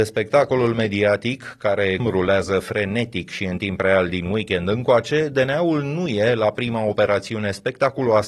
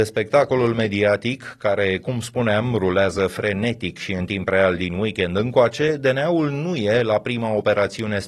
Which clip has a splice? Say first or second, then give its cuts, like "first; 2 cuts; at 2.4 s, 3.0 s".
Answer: first; 1 cut; at 2.0 s